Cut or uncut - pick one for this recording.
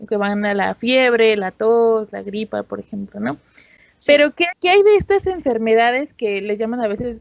cut